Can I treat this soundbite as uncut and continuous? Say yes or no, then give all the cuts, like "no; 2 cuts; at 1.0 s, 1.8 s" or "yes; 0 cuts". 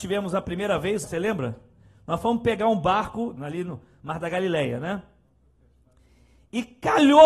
no; 2 cuts; at 1.0 s, 3.4 s